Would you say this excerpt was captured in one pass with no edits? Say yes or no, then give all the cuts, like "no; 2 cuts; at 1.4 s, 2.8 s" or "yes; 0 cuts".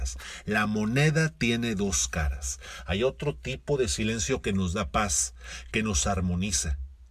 no; 1 cut; at 5.7 s